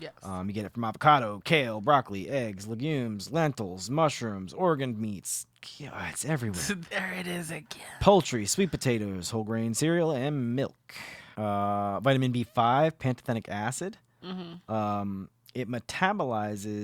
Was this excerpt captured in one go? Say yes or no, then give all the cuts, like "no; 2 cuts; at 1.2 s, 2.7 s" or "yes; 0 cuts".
no; 1 cut; at 11.3 s